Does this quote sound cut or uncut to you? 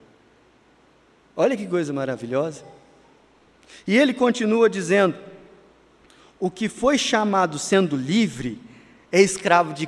uncut